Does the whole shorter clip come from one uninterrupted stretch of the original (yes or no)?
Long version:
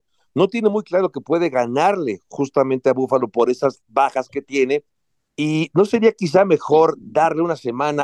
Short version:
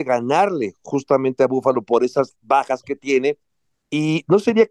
yes